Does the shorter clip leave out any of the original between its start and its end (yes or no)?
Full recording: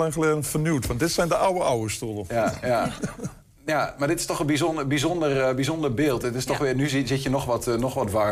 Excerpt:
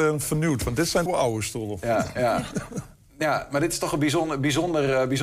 yes